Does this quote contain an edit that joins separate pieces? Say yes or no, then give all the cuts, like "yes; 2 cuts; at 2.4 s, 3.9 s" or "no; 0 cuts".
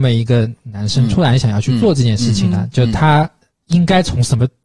no; 0 cuts